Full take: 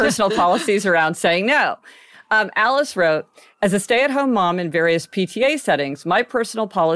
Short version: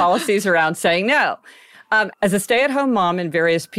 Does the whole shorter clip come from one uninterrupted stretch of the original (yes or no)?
no